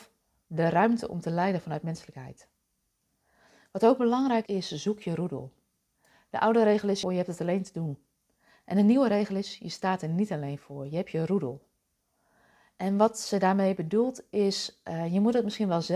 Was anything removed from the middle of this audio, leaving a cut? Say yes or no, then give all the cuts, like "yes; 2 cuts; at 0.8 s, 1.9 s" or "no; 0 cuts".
yes; 2 cuts; at 4.5 s, 7.0 s